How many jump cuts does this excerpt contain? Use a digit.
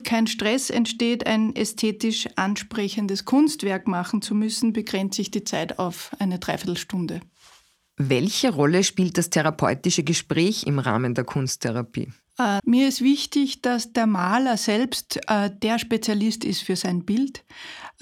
1